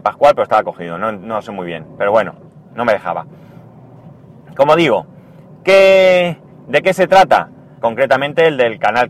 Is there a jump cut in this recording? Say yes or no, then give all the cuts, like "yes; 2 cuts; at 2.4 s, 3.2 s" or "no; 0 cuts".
yes; 1 cut; at 7.8 s